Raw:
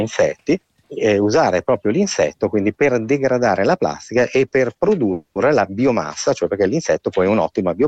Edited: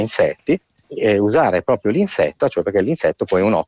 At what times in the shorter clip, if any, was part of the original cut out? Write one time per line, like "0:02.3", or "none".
0:02.4